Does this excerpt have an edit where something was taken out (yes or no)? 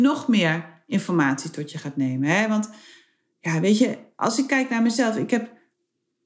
no